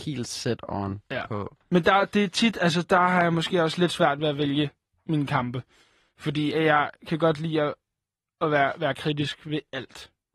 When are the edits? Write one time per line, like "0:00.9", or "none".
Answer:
none